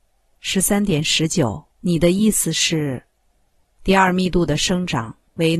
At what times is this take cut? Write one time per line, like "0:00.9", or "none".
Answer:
0:01.7
0:03.6